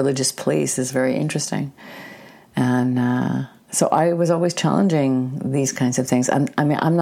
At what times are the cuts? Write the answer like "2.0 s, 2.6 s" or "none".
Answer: none

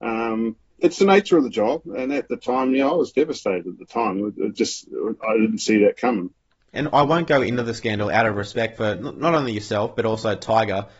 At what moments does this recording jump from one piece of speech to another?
6.7 s

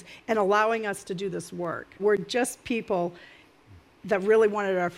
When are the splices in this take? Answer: 2.0 s

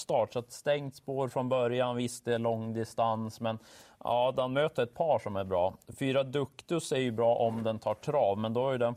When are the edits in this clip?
none

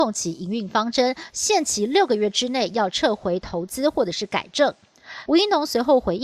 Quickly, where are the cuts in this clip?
1.3 s, 5.3 s

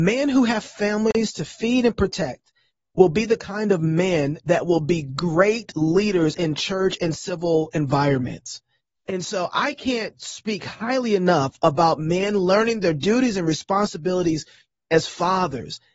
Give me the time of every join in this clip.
none

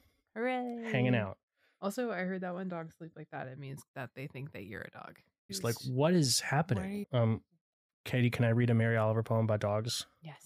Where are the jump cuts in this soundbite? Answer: 5.5 s, 7.0 s

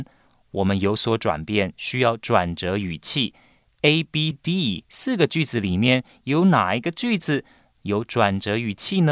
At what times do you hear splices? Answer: 4.3 s

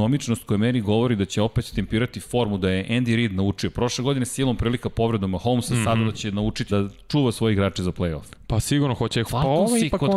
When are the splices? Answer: 6.7 s, 9.3 s

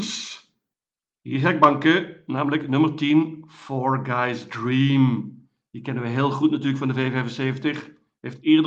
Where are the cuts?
none

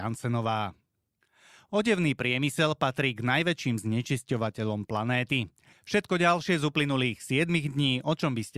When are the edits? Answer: 5.7 s

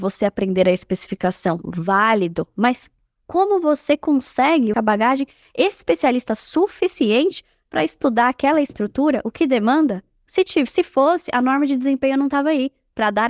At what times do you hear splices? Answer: 4.7 s

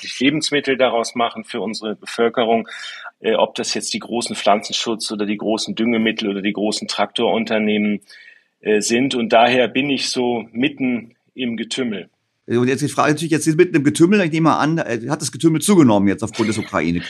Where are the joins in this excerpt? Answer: 3.1 s

